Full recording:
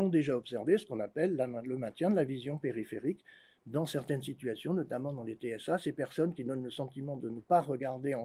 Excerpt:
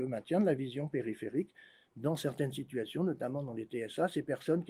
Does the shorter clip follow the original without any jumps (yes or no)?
yes